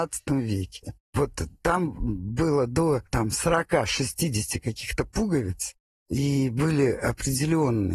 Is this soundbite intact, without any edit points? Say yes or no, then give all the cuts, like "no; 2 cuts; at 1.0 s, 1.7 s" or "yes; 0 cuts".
yes; 0 cuts